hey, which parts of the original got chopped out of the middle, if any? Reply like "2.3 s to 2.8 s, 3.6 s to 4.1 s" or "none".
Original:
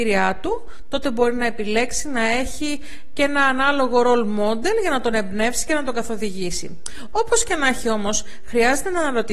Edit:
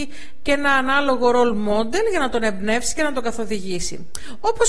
none